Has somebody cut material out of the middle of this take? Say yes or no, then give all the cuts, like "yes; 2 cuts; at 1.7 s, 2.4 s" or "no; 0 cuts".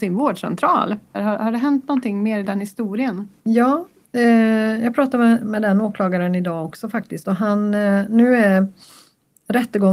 yes; 1 cut; at 1.1 s